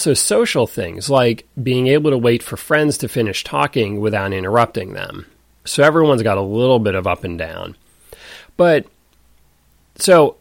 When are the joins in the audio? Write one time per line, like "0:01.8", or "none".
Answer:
0:05.7

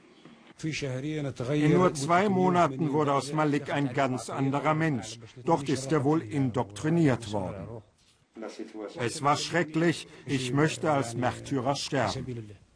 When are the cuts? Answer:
0:05.4
0:08.9
0:10.3

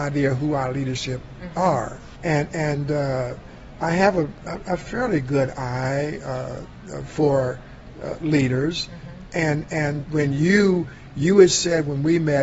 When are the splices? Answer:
0:02.2
0:10.0

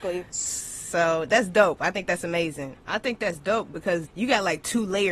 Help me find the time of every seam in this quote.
0:02.7
0:04.0

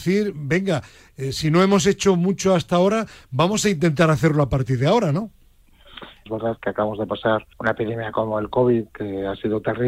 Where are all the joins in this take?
0:06.3
0:07.5

